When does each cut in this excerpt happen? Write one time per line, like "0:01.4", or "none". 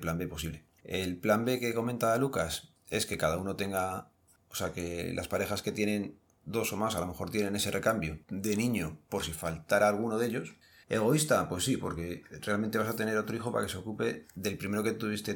0:10.8